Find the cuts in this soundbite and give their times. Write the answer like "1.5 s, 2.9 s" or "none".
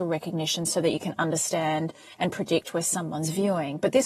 none